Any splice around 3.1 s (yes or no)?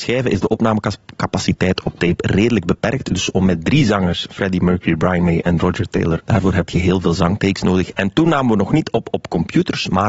no